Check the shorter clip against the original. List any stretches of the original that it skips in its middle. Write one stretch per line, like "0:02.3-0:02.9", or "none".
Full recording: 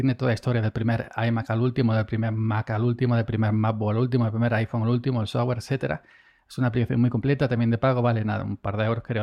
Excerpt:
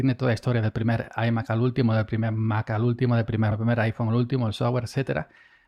0:03.5-0:04.3